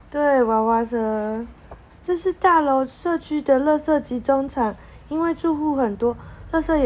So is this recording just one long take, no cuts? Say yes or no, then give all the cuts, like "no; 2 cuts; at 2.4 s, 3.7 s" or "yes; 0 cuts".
no; 1 cut; at 1.9 s